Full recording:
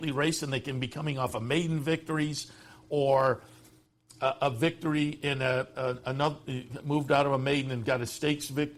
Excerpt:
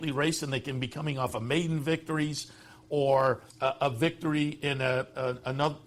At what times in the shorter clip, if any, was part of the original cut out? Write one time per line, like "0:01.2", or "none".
0:03.5

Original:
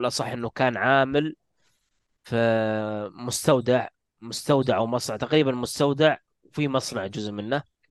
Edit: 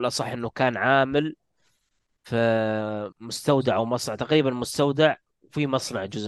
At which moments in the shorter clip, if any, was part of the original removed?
0:03.1

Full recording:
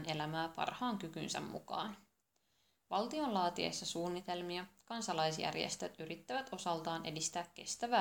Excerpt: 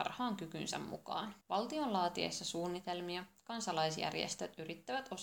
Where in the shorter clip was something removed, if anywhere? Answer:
0:01.4

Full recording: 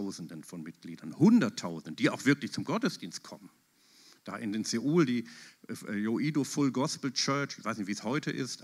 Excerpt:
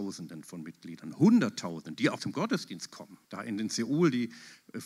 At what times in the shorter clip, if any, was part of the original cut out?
0:02.2
0:03.3

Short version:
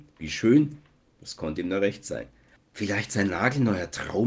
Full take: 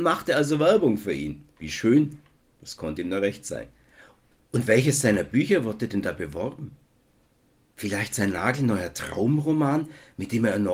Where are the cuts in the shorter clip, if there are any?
0:02.6

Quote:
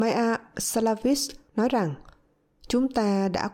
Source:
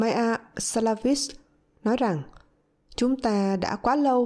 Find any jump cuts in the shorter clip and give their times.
0:01.5

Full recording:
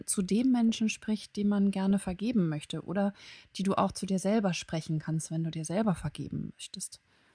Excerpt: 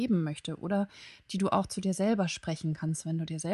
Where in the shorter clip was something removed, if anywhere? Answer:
none

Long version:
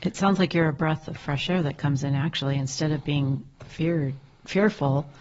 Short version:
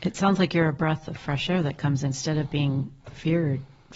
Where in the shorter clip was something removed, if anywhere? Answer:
0:02.1

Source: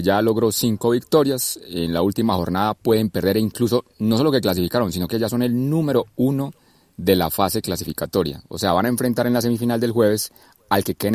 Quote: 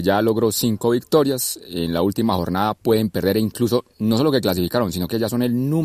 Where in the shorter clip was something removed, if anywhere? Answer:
none

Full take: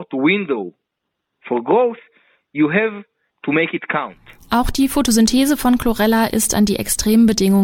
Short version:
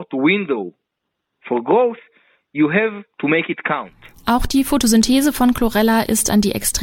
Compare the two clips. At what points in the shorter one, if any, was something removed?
0:03.1

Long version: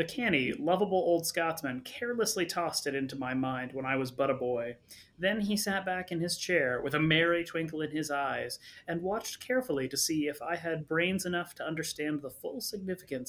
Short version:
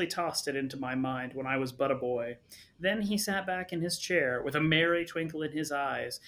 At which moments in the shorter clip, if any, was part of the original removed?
none

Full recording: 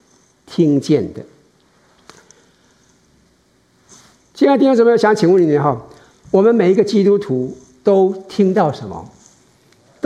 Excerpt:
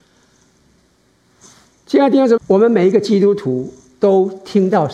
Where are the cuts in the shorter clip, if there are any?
0:02.4

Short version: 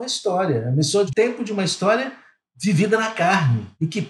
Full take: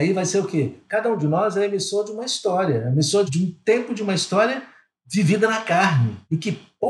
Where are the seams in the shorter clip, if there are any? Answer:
0:01.1

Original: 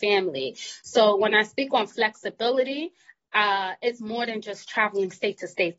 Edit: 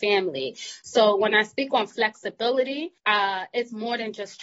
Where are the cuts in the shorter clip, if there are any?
0:03.0

